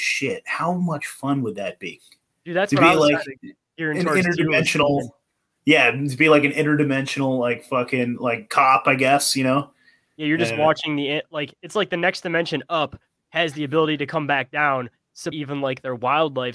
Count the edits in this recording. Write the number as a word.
one